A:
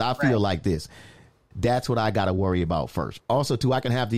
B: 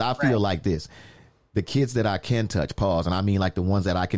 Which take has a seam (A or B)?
A